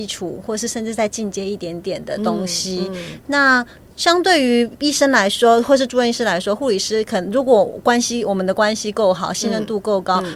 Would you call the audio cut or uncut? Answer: uncut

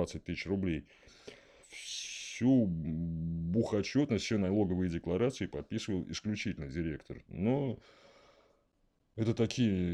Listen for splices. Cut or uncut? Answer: cut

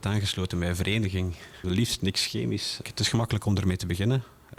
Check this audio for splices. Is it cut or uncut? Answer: cut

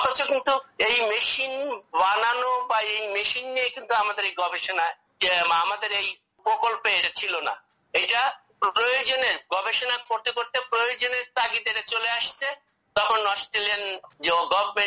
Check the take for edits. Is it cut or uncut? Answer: uncut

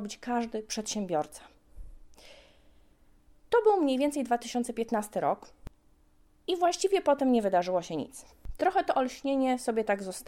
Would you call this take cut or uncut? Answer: uncut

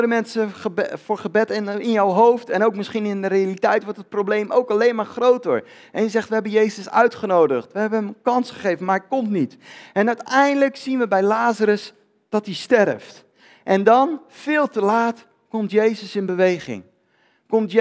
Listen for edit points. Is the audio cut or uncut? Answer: uncut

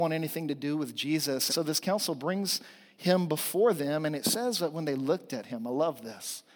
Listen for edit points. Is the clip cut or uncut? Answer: cut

